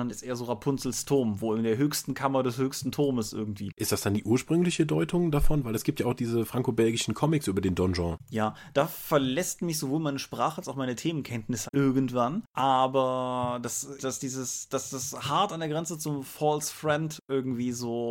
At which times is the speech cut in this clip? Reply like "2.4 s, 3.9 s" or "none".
11.7 s, 14.0 s